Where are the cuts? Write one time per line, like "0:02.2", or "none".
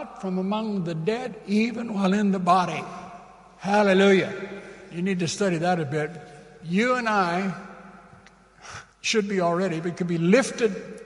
0:08.9